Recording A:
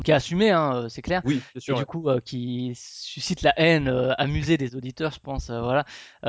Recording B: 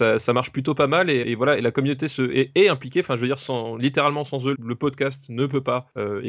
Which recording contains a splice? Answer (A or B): B